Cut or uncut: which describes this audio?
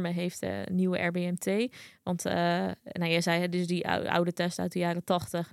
uncut